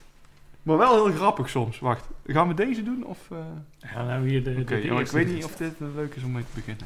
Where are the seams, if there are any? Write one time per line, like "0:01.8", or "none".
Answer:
none